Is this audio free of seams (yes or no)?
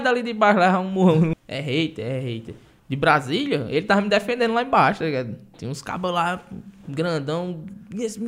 no